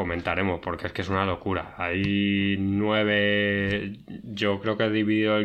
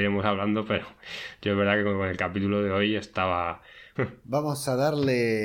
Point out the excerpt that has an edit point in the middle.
second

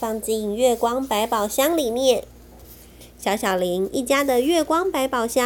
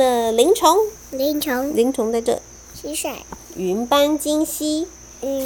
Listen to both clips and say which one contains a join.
second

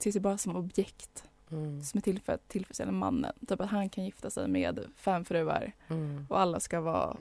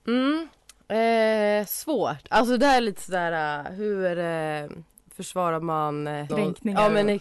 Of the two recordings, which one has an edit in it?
second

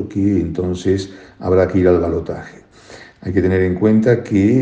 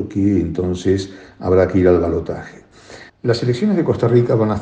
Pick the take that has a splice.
second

